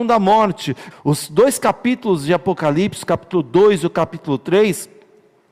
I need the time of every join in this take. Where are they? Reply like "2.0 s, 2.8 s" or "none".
0.9 s